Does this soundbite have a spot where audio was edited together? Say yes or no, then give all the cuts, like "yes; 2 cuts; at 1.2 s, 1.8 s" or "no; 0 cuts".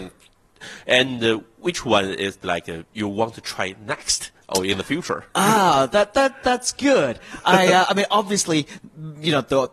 no; 0 cuts